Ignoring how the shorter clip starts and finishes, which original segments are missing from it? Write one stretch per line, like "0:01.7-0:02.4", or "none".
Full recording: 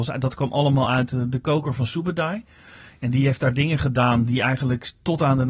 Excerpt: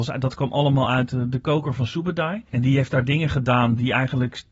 0:02.5-0:03.0